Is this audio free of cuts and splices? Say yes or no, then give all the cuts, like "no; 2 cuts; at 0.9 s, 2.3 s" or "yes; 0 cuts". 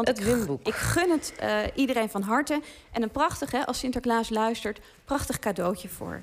yes; 0 cuts